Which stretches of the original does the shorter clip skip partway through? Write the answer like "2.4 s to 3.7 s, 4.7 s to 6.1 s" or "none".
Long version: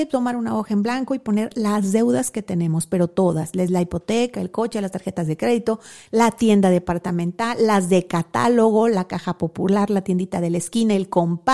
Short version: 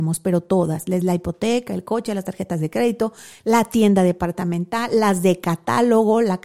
none